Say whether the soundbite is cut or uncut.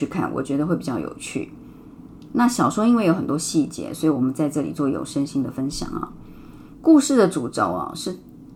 cut